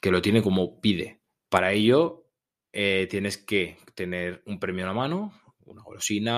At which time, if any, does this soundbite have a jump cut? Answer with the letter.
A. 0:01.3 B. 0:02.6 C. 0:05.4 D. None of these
A